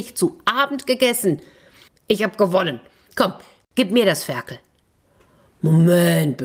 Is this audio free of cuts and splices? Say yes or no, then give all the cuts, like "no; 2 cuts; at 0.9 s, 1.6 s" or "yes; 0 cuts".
no; 1 cut; at 1.9 s